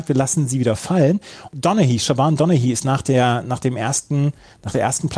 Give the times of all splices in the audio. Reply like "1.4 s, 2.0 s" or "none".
none